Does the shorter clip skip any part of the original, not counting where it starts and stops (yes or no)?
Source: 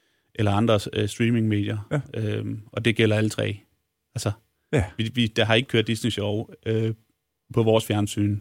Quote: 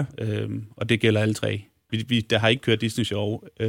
yes